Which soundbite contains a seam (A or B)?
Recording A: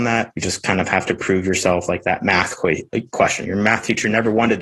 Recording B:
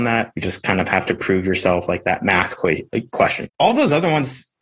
B